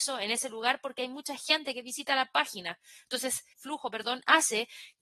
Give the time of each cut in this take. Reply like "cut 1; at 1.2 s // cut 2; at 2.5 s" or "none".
cut 1; at 3.5 s